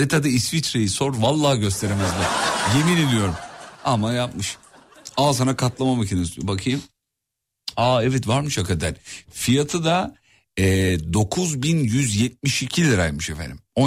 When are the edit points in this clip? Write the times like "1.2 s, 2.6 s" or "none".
none